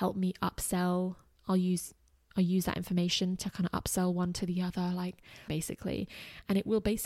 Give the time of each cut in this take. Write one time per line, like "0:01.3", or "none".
0:05.5